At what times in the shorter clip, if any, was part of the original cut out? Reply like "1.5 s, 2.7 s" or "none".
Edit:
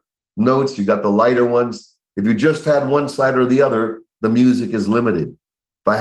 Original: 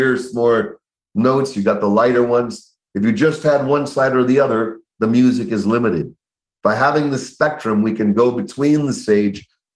none